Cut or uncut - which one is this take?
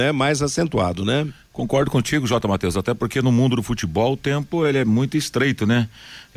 uncut